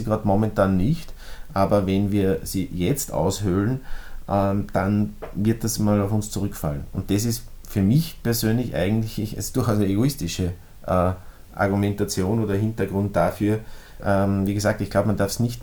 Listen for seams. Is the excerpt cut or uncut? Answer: cut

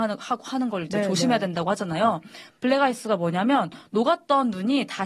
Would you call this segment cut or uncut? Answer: uncut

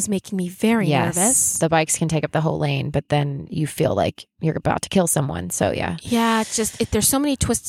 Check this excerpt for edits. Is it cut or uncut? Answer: uncut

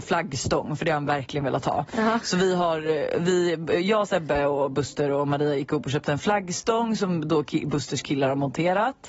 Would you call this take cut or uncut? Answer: uncut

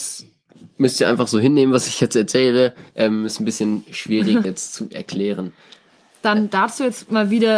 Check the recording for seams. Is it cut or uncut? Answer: cut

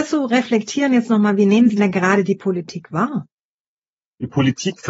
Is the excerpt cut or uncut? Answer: cut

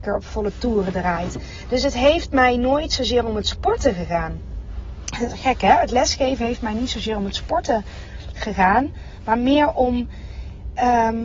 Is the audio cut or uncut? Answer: uncut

